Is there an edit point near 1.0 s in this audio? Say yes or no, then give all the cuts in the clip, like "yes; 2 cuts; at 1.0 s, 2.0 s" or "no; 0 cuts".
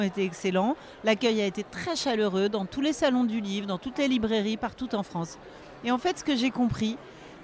no; 0 cuts